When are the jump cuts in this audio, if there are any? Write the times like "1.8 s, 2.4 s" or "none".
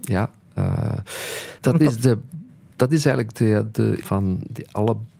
1.6 s, 4.0 s